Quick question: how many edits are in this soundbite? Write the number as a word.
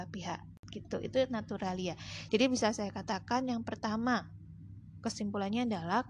one